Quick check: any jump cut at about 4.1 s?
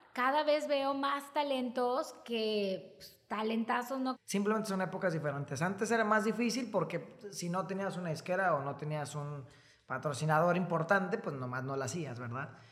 yes; 1 cut; at 4.1 s

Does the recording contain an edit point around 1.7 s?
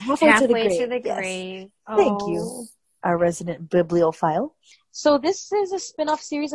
no; 0 cuts

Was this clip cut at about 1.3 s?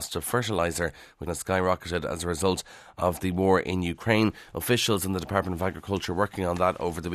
yes; 1 cut; at 1.3 s

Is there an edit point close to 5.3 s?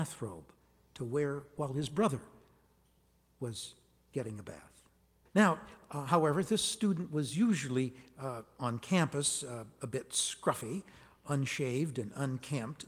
yes; 1 cut; at 5.3 s

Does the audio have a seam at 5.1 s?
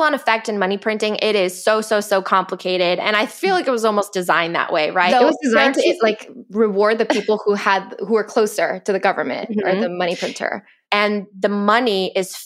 yes; 2 cuts; at 5.1 s, 10.8 s

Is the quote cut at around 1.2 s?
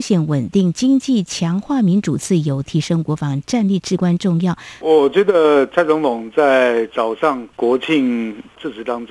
no; 2 cuts; at 4.8 s, 7.5 s

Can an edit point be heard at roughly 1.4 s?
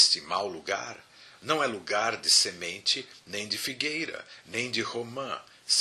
no; 1 cut; at 4.4 s

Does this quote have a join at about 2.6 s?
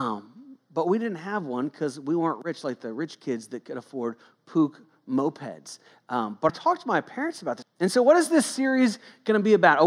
no; 2 cuts; at 6.5 s, 7.6 s

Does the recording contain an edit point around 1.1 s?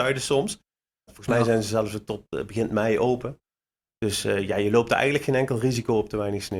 yes; 1 cut; at 1.1 s

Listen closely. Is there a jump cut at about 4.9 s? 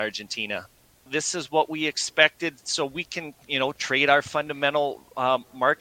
no; 2 cuts; at 1.1 s, 3.4 s

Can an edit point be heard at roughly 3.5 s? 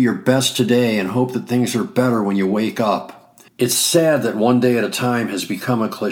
yes; 1 cut; at 3.5 s

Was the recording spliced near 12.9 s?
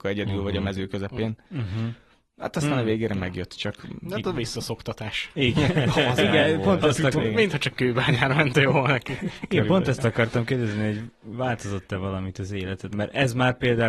yes; 2 cuts; at 7.1 s, 12.9 s

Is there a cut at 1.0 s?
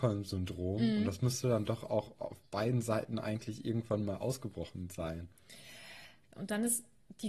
no; 1 cut; at 6.2 s

